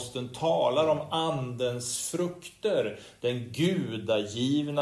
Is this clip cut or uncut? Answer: cut